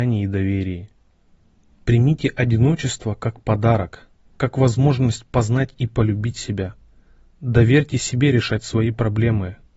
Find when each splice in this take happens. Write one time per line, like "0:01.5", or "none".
none